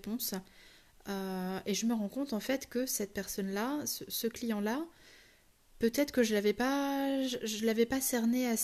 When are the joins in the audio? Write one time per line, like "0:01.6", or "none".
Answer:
none